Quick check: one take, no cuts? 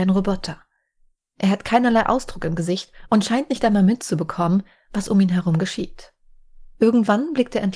no; 1 cut; at 6.8 s

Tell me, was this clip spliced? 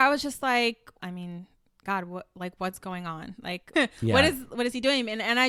yes; 2 cuts; at 1.0 s, 3.7 s

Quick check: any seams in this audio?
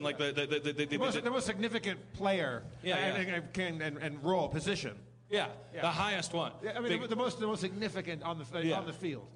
no; 0 cuts

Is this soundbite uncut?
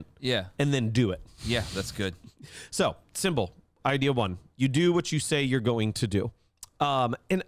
yes; 0 cuts

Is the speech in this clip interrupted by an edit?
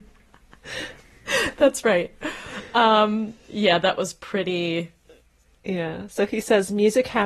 no; 0 cuts

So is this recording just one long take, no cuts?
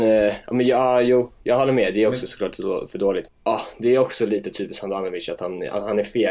no; 1 cut; at 3.3 s

